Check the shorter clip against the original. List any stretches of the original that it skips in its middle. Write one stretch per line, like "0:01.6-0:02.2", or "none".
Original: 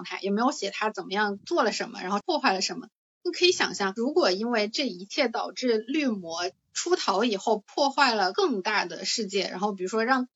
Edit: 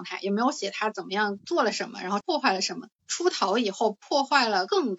0:03.0-0:06.7